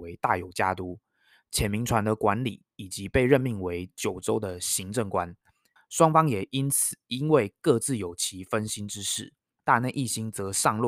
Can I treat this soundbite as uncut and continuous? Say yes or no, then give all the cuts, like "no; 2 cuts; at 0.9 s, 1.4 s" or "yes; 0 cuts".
no; 2 cuts; at 5.8 s, 9.6 s